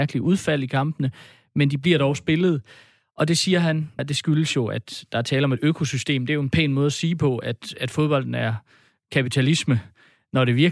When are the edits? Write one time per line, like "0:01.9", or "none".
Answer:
0:04.0